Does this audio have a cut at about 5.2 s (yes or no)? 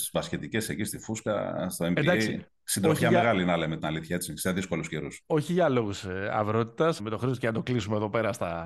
yes